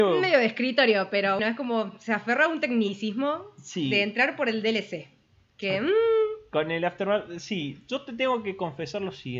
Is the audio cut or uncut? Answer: cut